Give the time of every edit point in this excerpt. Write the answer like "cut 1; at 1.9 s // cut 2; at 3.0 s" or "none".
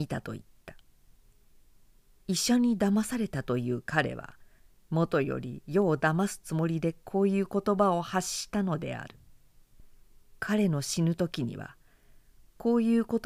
none